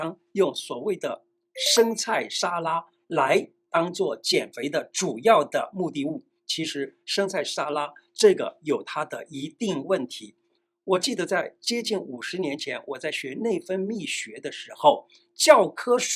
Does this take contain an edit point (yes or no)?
no